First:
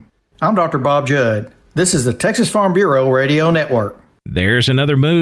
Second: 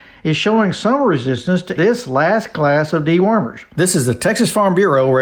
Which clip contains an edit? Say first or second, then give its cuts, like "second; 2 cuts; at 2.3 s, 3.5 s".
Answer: second; 2 cuts; at 1.8 s, 3.7 s